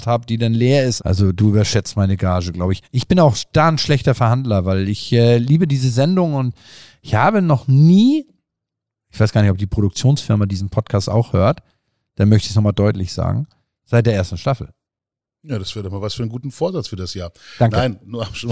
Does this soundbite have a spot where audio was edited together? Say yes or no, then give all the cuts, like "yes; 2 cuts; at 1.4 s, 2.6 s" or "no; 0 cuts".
yes; 2 cuts; at 1.0 s, 13.8 s